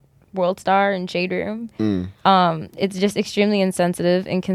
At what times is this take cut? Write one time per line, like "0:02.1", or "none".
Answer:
0:02.2

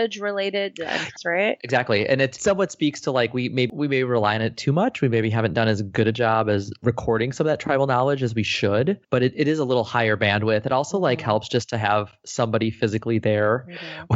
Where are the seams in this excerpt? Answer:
0:01.2
0:09.0

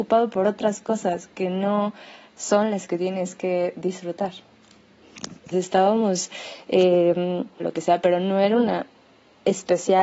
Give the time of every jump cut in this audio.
0:05.5
0:07.6

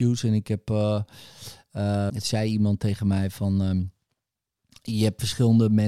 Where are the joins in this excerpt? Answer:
0:02.1

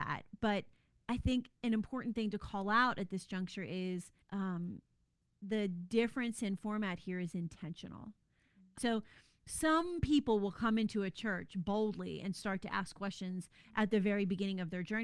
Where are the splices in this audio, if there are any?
0:04.2
0:08.8

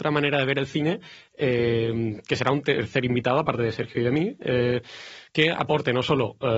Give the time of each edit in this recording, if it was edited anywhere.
none

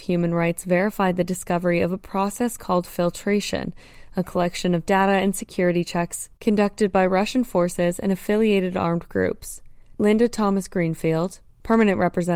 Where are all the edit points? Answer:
none

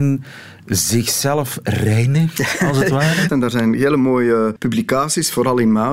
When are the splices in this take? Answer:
0:03.3
0:04.6

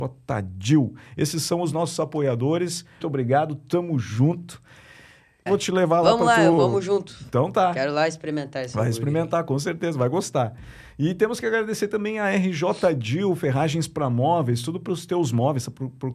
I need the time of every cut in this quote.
0:03.0
0:05.5

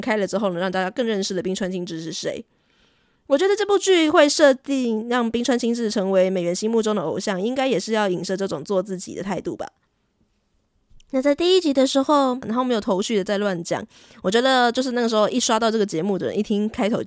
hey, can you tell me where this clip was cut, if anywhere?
0:12.4

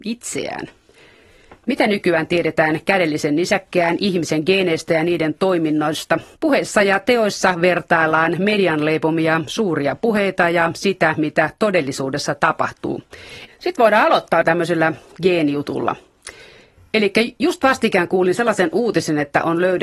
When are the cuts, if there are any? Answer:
0:06.3
0:13.5

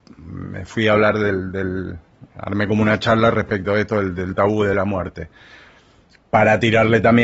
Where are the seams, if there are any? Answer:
none

